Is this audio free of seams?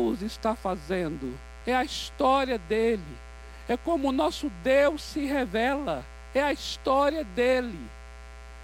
yes; 0 cuts

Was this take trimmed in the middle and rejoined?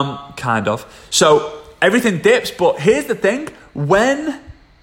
no; 0 cuts

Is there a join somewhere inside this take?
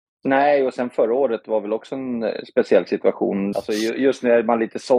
yes; 1 cut; at 3.5 s

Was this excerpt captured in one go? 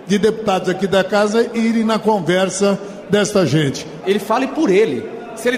no; 1 cut; at 4.0 s

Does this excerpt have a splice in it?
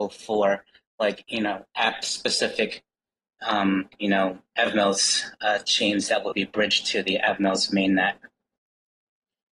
no; 0 cuts

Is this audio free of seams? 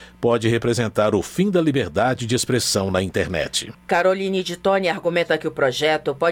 yes; 0 cuts

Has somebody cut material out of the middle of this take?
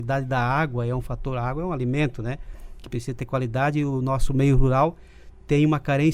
no; 0 cuts

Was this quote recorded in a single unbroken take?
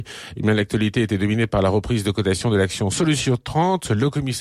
yes; 0 cuts

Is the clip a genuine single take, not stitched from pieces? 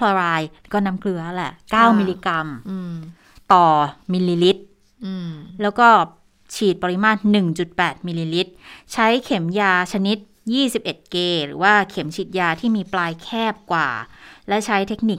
yes; 0 cuts

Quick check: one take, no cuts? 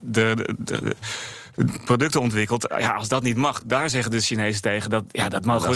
yes; 0 cuts

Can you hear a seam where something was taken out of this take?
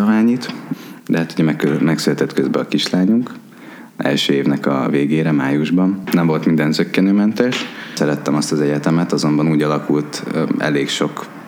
no; 0 cuts

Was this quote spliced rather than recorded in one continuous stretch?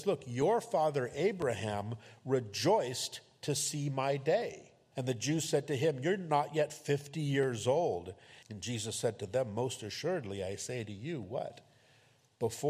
yes; 2 cuts; at 4.9 s, 8.4 s

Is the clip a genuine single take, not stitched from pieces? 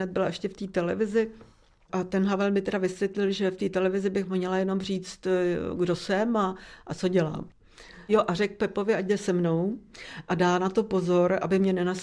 yes; 0 cuts

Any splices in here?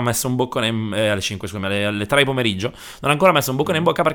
no; 0 cuts

